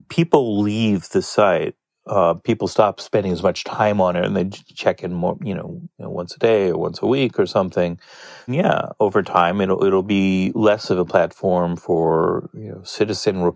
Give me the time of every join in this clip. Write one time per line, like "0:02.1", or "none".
0:08.5